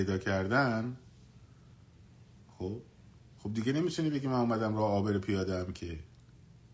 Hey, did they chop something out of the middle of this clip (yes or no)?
no